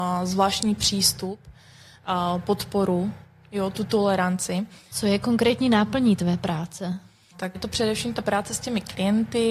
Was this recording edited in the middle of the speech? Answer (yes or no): yes